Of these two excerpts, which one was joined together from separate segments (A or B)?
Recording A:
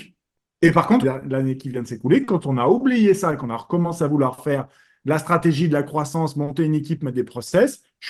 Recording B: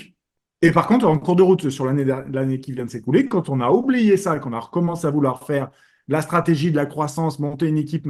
A